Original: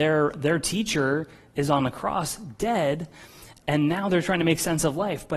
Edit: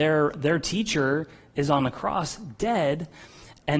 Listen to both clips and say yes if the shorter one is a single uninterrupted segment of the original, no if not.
yes